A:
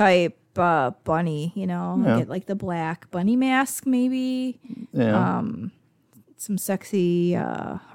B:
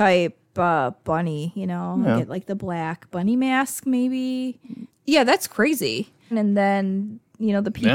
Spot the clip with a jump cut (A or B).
B